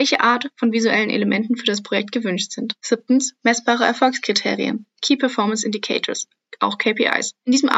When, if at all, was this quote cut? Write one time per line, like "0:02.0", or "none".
0:02.8